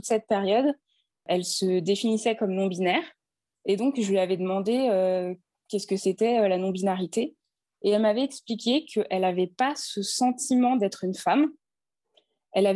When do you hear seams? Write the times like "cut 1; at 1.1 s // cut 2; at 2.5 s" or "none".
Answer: none